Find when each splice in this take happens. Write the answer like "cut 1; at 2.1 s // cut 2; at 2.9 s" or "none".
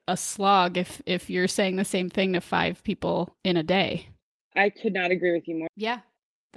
cut 1; at 5.7 s